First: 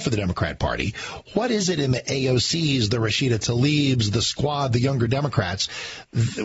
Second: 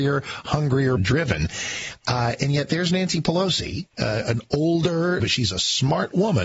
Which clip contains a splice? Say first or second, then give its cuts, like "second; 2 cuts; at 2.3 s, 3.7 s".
second; 2 cuts; at 1.0 s, 5.2 s